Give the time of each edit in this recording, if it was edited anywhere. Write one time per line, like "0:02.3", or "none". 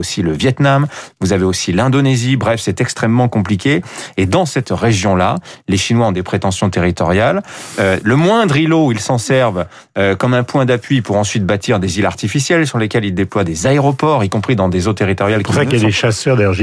none